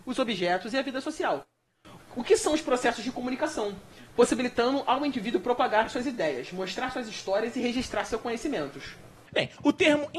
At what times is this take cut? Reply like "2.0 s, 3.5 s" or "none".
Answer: 2.0 s, 9.3 s